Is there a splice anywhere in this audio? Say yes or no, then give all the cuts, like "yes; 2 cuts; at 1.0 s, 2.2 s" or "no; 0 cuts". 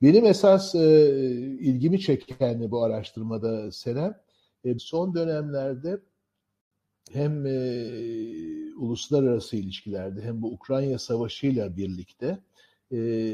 yes; 2 cuts; at 4.8 s, 7.1 s